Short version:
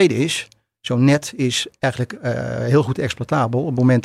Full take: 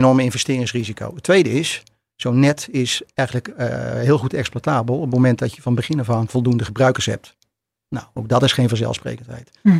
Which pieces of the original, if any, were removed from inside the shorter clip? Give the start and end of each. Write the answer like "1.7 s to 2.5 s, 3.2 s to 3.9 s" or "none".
none